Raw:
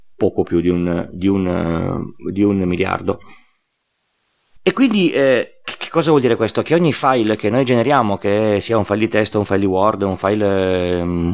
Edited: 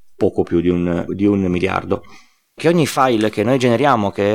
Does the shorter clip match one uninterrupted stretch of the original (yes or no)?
no